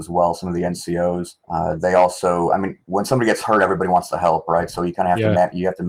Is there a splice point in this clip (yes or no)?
yes